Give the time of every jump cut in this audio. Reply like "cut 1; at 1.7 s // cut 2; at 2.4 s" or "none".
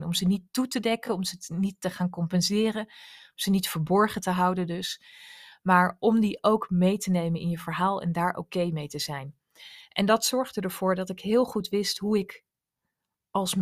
none